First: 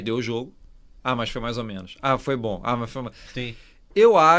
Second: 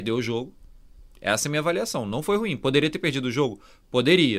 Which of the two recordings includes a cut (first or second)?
first